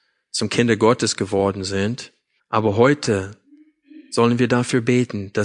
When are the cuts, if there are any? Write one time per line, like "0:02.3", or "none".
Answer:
0:02.4